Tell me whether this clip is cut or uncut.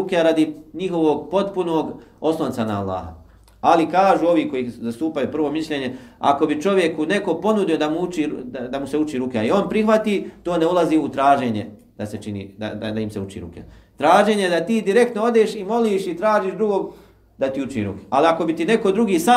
uncut